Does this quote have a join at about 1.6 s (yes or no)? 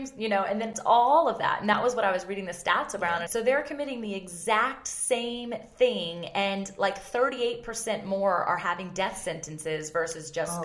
no